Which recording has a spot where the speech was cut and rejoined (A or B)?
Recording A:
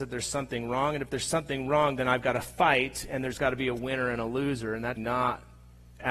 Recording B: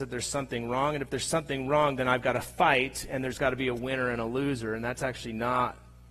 A